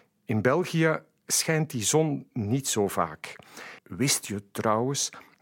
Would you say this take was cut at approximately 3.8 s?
yes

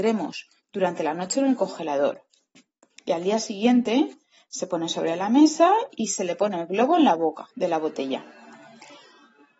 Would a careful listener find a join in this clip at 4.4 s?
no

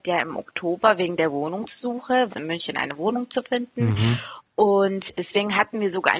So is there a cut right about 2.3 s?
yes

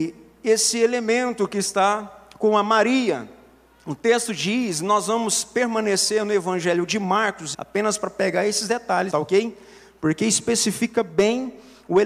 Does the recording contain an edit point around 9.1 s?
yes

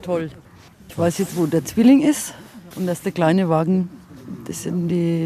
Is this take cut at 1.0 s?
no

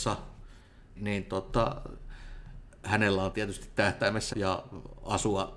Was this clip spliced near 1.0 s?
yes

